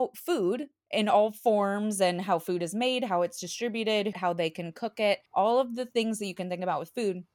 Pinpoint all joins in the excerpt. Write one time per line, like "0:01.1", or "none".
0:04.1
0:05.3

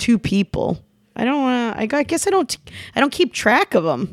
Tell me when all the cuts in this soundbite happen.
0:01.0

